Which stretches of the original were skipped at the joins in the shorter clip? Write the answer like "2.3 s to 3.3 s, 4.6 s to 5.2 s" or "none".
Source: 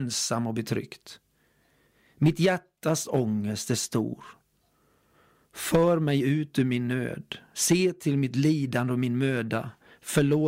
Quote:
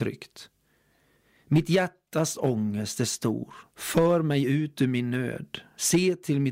4.4 s to 5.4 s